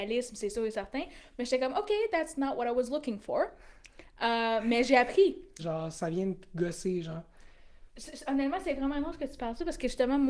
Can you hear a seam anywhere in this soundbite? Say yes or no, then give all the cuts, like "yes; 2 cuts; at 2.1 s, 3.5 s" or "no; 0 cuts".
yes; 1 cut; at 5.6 s